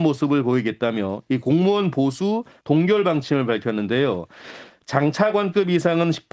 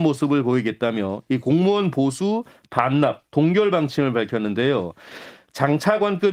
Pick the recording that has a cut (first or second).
first